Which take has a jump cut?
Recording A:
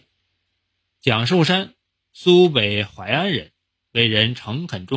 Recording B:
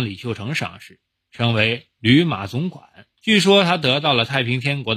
B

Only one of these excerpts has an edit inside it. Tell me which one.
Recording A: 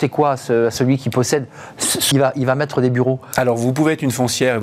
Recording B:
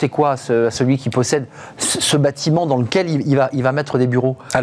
A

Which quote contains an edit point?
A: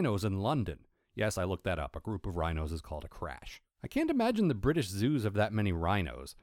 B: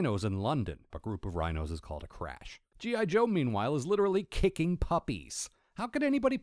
B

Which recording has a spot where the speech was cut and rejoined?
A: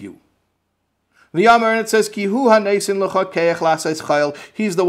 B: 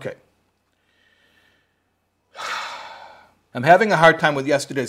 B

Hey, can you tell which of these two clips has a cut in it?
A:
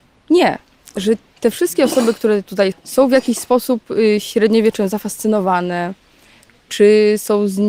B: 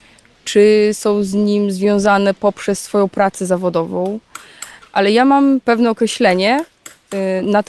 A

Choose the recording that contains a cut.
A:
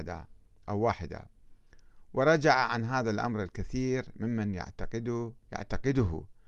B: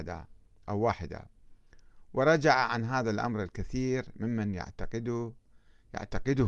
A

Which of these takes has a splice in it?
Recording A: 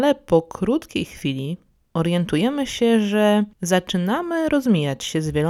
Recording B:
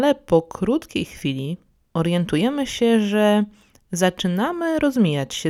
A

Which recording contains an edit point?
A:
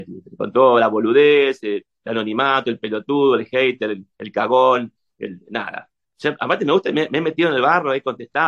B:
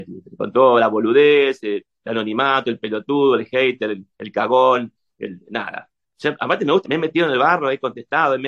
B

